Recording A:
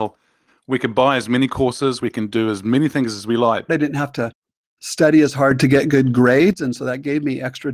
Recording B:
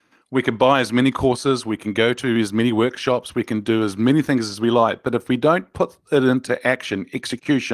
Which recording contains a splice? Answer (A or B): A